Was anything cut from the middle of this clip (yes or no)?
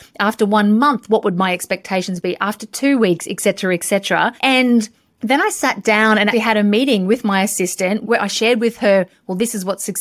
yes